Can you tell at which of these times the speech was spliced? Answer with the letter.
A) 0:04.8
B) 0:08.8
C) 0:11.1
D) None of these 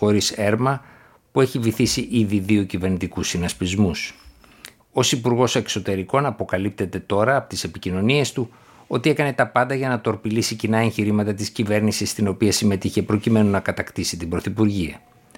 A